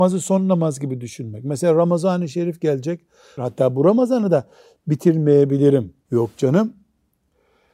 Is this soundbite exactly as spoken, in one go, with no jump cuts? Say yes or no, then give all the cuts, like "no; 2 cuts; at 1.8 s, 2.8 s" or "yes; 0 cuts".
no; 2 cuts; at 3.4 s, 6.1 s